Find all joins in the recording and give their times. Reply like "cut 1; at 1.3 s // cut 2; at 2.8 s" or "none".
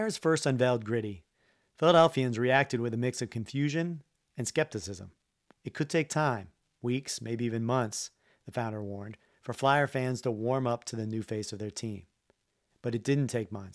cut 1; at 5.5 s